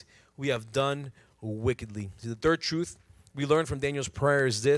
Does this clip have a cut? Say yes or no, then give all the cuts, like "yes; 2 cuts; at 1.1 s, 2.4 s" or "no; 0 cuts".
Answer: no; 0 cuts